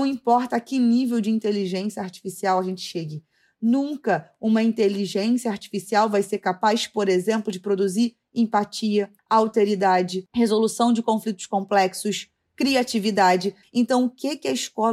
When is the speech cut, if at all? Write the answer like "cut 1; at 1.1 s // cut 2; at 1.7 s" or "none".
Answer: cut 1; at 9.2 s // cut 2; at 13.6 s